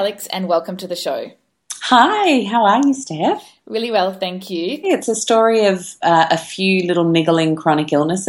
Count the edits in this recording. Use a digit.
1